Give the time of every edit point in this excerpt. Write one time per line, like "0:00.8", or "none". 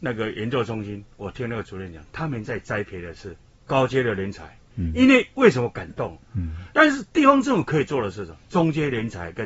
0:04.7
0:06.2